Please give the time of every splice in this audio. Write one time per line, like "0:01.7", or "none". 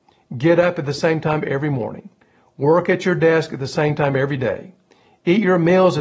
none